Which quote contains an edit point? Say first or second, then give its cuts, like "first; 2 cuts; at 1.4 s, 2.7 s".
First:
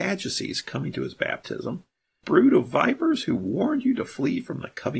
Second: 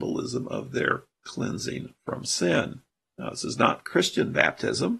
first; 1 cut; at 2.2 s